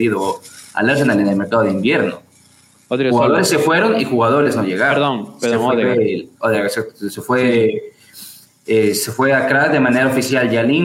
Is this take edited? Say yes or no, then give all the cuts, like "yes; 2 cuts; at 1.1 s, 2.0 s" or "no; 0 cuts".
no; 0 cuts